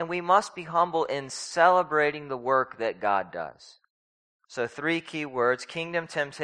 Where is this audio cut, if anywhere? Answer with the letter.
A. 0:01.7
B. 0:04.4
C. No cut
C